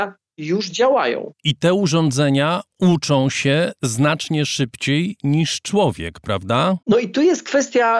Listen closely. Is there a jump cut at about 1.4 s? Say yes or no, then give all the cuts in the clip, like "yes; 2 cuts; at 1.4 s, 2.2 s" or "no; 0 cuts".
no; 1 cut; at 6.8 s